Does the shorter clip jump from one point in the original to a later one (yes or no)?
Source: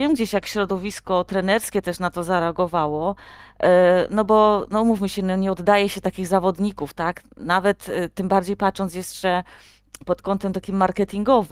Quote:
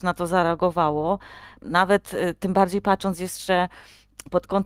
yes